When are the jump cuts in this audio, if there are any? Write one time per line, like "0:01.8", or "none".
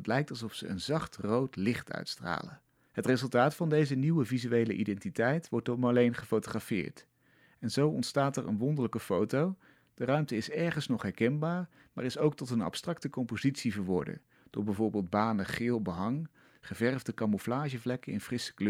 0:02.9